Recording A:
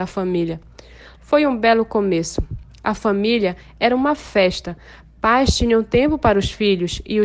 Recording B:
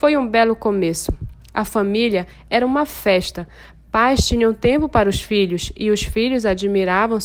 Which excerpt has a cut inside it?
A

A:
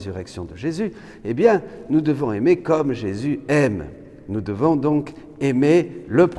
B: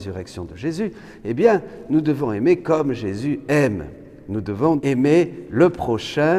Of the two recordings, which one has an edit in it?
B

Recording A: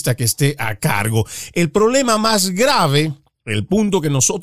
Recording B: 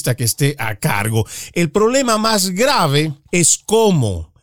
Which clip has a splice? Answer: B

